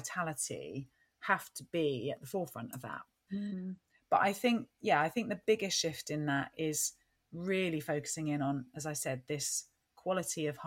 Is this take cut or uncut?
cut